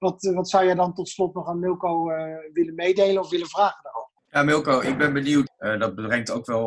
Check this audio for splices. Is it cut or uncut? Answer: cut